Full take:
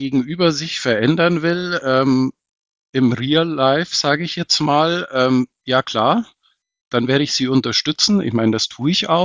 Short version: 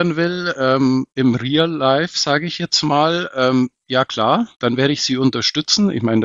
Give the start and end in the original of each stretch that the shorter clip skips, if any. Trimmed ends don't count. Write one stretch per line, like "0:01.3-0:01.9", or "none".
0:02.4-0:02.9
0:06.3-0:06.9